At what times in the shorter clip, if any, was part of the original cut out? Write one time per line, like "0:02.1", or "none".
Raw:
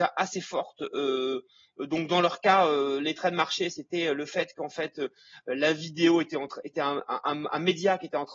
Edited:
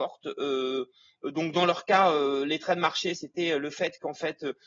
none

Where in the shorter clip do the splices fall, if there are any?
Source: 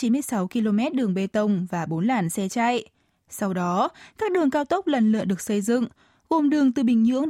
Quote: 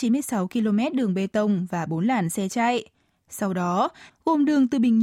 0:04.1

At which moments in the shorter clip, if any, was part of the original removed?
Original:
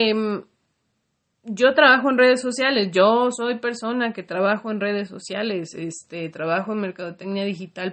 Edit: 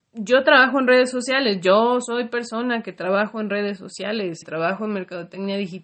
0:04.4

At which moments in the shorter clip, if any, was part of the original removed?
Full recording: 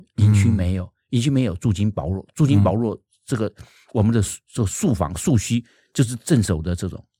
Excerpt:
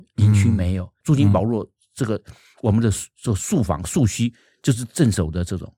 0:01.0

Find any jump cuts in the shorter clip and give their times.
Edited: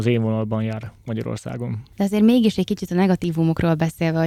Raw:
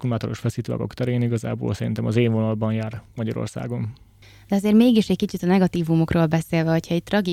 0:01.9

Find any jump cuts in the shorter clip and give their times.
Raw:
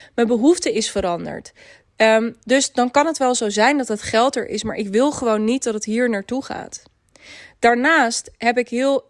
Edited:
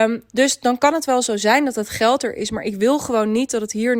none

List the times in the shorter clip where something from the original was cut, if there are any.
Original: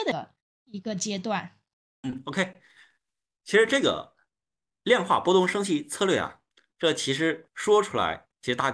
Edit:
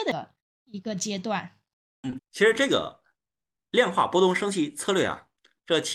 0:02.2

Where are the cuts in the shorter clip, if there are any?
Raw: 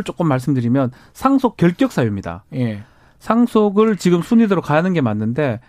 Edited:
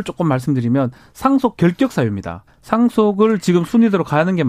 0:02.5

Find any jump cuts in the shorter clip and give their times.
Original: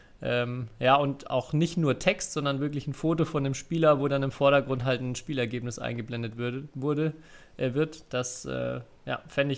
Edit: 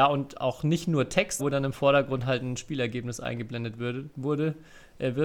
0:01.4

